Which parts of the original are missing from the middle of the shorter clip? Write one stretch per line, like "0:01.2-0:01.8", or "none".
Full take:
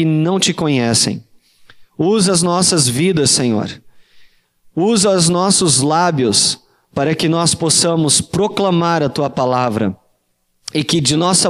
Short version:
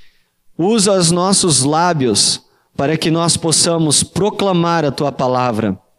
none